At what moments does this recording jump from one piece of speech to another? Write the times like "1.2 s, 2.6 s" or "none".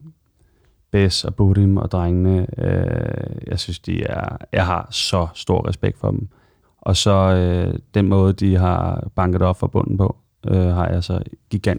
6.6 s